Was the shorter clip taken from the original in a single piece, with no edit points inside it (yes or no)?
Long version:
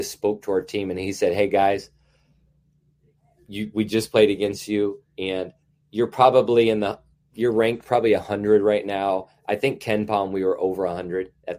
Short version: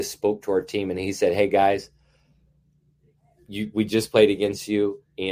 yes